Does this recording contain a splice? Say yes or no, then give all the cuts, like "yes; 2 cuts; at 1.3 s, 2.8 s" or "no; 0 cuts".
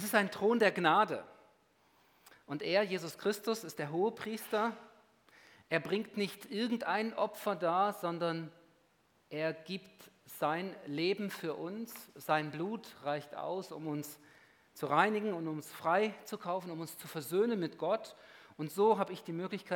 no; 0 cuts